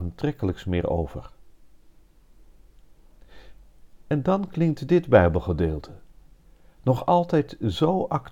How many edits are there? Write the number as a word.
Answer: zero